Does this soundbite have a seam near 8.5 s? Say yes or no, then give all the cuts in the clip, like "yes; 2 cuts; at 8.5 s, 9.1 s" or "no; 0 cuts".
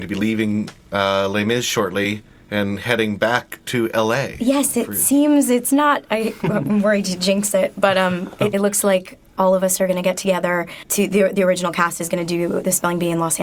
yes; 1 cut; at 8.5 s